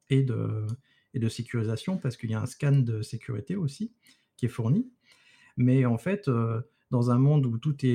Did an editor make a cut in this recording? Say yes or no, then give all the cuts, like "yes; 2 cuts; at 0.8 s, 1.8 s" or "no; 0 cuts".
yes; 1 cut; at 5.4 s